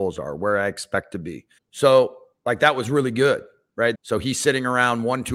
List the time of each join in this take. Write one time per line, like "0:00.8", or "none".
0:01.6
0:03.9